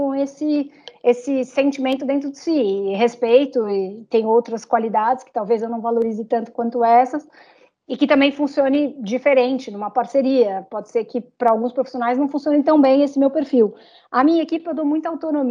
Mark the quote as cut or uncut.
uncut